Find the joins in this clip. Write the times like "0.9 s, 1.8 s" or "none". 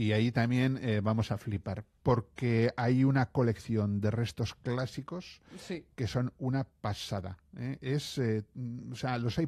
none